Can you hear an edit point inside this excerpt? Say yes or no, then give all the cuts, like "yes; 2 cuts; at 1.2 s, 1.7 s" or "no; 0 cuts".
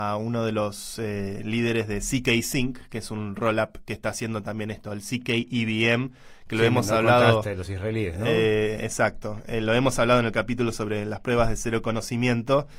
no; 0 cuts